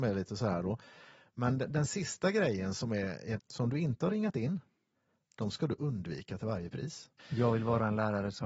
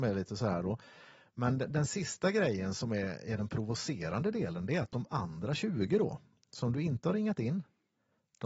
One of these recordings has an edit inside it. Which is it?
first; 2 cuts; at 3.4 s, 7.2 s

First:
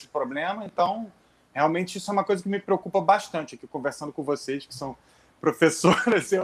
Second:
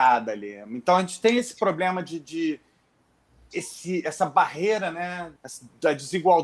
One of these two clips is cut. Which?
second; 1 cut; at 5.4 s

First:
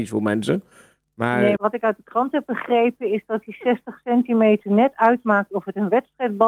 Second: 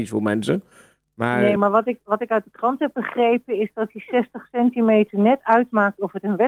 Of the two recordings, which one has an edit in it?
first; 1 cut; at 1.6 s

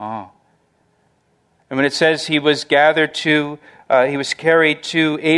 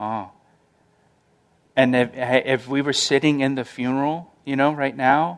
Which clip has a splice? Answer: first; 1 cut; at 1.6 s

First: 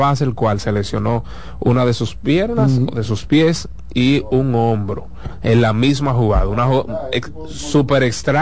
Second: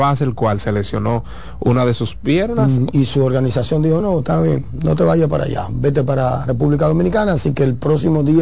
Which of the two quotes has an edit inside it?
second; 2 cuts; at 2.9 s, 4.0 s

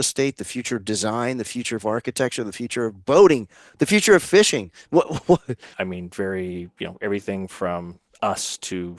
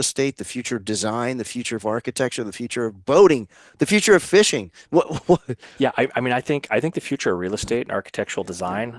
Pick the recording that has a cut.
first; 1 cut; at 5.7 s

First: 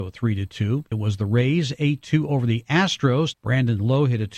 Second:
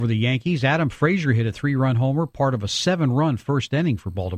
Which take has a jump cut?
first; 1 cut; at 3.3 s

